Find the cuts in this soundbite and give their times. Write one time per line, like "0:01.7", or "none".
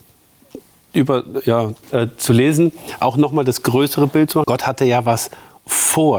0:01.8
0:04.4